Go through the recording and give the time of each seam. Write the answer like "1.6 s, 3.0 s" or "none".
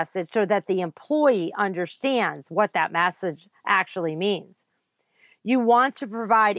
none